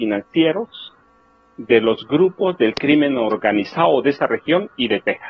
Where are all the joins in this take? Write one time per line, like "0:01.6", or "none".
none

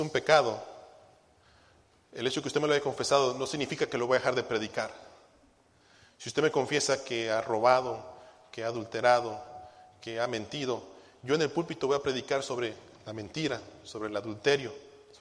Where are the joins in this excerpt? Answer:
none

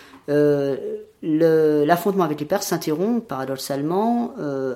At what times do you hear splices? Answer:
none

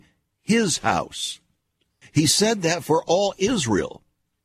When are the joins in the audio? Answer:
0:02.0

